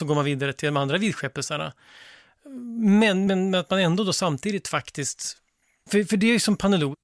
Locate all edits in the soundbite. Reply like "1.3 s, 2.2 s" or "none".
3.3 s